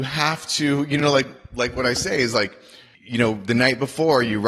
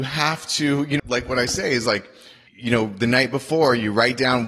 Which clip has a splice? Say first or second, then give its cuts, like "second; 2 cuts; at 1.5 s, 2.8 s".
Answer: second; 1 cut; at 1.0 s